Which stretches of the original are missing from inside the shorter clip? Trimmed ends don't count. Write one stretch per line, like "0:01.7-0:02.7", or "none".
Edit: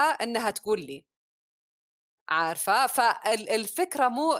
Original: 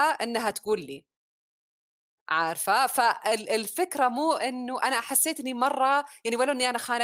none